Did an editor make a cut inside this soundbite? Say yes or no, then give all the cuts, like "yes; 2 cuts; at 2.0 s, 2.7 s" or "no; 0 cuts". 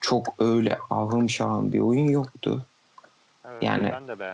no; 0 cuts